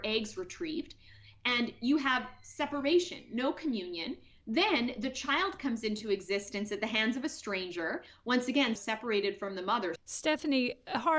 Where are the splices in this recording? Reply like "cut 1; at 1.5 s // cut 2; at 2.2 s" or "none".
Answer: cut 1; at 8.8 s // cut 2; at 10.0 s